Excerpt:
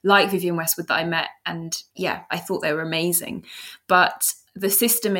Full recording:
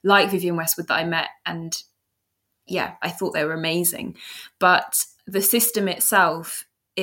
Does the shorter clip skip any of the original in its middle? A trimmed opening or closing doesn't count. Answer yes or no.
yes